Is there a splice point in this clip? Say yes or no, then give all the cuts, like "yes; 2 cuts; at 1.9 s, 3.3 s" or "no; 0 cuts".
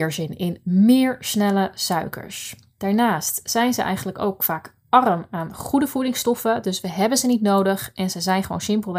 no; 0 cuts